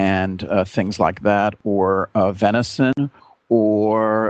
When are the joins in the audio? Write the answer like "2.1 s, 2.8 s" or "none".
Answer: none